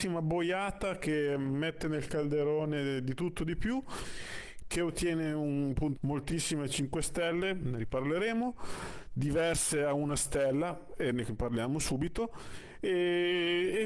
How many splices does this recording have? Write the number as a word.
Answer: one